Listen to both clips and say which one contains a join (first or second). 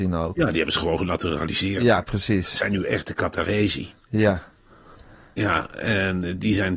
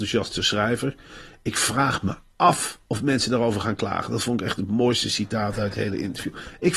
second